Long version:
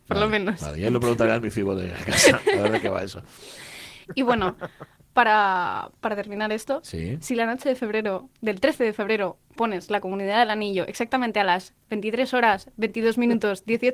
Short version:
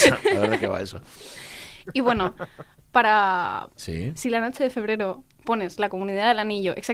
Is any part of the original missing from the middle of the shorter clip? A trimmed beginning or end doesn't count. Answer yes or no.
yes